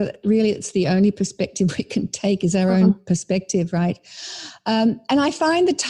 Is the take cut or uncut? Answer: uncut